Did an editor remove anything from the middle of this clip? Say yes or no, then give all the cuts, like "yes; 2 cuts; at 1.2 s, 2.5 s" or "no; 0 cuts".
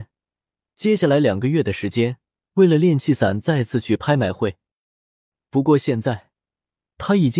yes; 1 cut; at 2.4 s